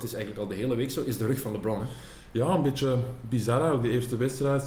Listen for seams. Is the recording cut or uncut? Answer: uncut